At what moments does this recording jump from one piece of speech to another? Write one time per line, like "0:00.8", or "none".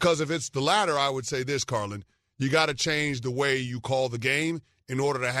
none